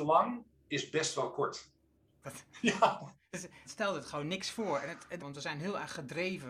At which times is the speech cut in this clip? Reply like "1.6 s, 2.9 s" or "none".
2.2 s, 3.6 s, 5.2 s